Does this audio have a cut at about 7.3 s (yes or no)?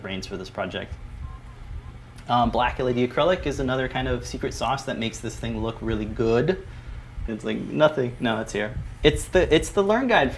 yes